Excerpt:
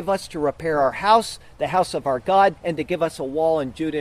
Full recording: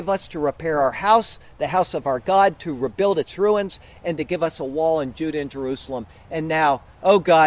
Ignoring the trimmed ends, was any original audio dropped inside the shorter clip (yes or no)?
yes